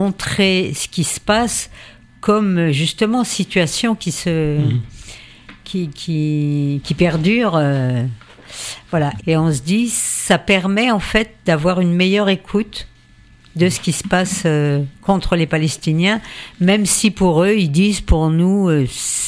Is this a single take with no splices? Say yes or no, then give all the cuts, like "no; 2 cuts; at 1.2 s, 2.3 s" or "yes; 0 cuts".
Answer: no; 1 cut; at 9.2 s